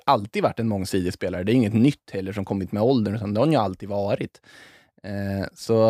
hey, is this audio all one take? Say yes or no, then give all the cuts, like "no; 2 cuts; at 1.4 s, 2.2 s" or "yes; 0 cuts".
yes; 0 cuts